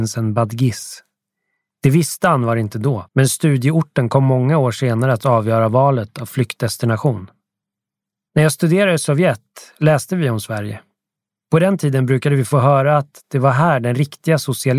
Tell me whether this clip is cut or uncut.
cut